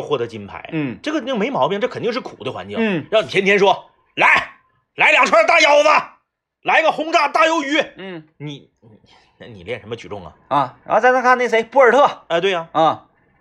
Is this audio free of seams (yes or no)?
yes